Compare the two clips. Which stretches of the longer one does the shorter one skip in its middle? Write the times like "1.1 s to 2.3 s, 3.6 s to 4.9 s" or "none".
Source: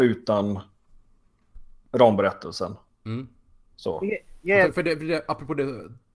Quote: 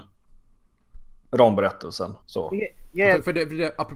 2.8 s to 3.7 s